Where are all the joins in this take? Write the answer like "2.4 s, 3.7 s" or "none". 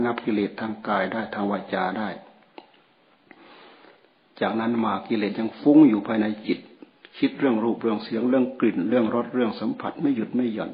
none